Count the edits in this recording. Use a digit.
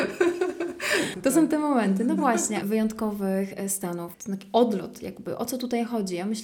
3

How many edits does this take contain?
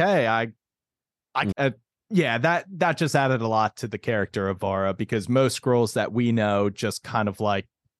1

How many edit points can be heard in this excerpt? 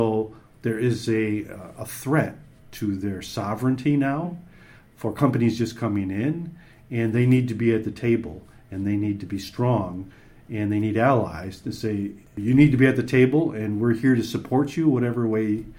0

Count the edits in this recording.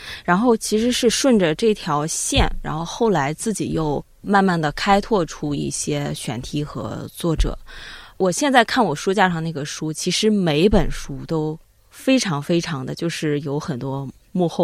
0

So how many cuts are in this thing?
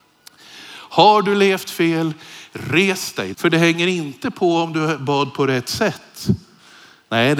1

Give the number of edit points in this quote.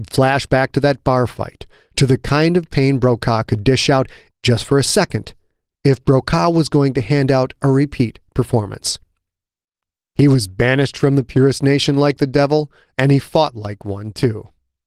2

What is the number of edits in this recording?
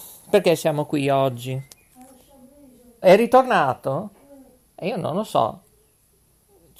1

